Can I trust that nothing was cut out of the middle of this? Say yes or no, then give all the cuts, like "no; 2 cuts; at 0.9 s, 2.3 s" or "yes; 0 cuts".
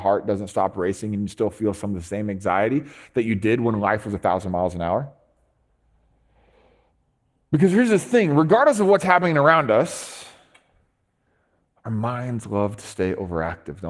yes; 0 cuts